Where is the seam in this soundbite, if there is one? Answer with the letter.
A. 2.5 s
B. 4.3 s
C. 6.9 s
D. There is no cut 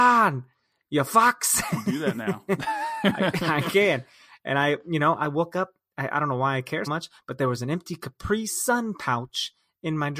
C